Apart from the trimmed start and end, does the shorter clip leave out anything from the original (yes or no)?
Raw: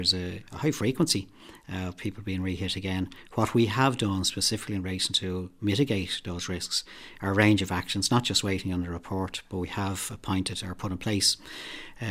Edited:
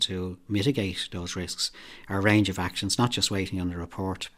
no